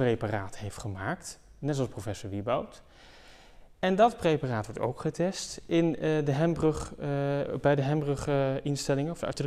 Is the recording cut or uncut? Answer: uncut